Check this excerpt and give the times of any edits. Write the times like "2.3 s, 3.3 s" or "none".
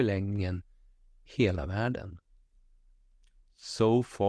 none